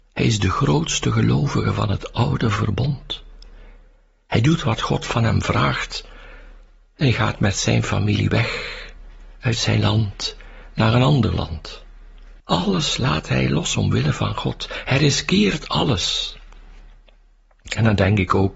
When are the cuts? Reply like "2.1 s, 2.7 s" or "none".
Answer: 12.4 s